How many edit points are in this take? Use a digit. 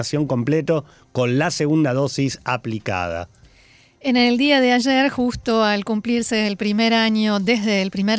0